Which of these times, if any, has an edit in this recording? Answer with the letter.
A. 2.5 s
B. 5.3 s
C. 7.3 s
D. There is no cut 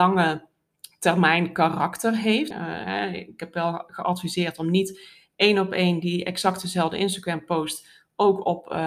A